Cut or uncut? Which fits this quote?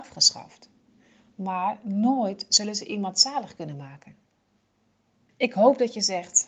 cut